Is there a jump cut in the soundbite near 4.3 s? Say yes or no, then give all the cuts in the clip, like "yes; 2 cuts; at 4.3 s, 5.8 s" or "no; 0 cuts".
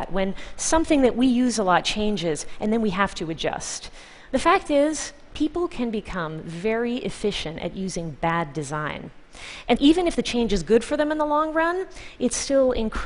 no; 1 cut; at 9.8 s